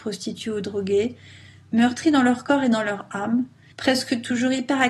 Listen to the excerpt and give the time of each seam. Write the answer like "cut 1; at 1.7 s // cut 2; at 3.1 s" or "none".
cut 1; at 3.7 s